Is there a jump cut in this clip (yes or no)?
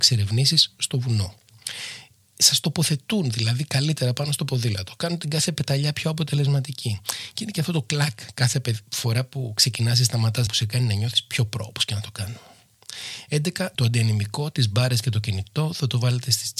yes